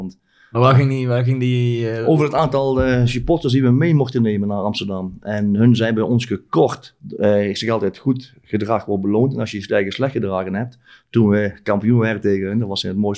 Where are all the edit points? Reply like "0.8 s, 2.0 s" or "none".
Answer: 7.0 s